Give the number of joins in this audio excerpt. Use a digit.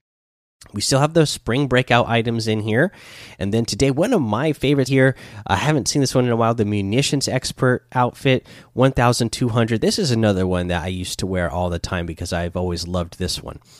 1